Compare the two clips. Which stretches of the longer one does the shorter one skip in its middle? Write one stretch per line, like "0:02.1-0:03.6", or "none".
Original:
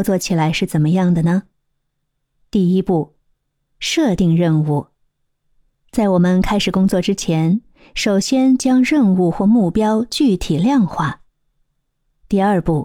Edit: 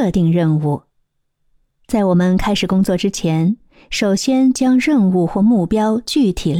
none

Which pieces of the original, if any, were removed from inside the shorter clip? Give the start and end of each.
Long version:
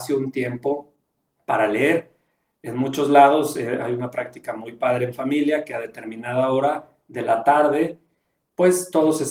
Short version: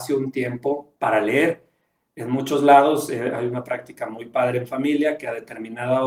0:01.0-0:01.4

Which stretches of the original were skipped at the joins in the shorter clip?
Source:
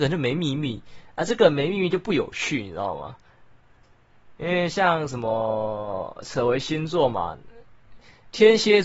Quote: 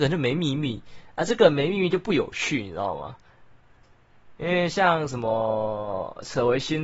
none

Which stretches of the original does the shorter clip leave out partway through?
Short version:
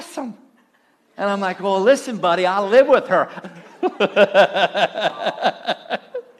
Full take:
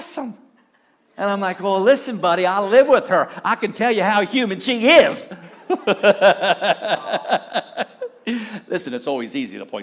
0:03.4-0:05.3

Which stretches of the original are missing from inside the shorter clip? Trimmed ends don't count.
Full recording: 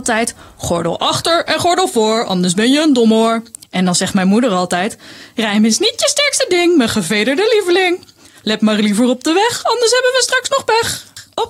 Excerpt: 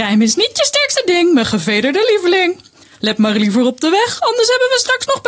none

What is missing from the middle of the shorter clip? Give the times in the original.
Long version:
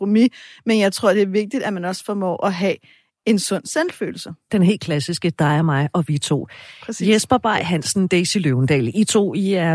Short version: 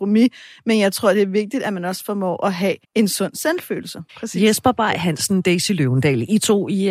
0:02.8-0:03.1
0:04.4-0:06.7

